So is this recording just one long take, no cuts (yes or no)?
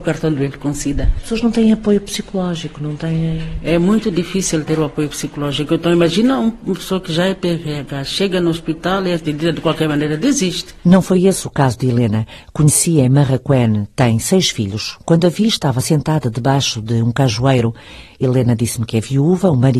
yes